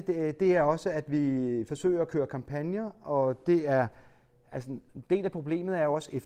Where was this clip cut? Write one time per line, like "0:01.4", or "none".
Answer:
0:04.9

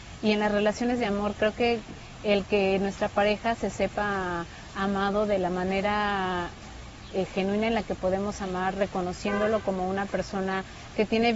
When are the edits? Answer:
none

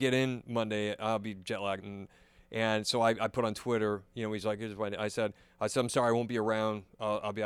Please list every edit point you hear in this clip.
0:01.8

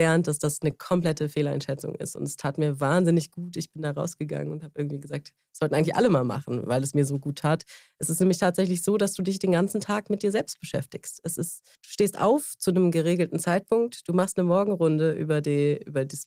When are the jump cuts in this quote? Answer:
0:11.8

